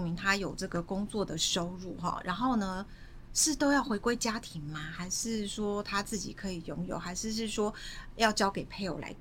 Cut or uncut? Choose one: uncut